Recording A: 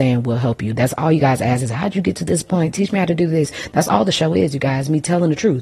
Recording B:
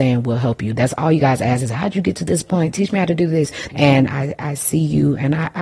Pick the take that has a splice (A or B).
B